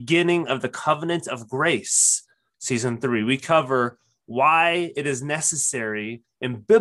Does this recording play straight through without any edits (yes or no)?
no